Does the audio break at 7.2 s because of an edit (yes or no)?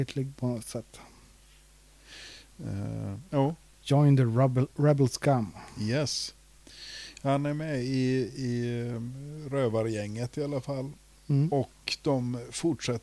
no